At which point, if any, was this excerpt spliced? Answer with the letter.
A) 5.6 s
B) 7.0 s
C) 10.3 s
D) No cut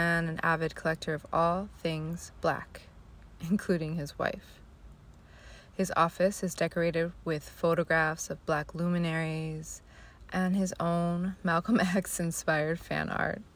C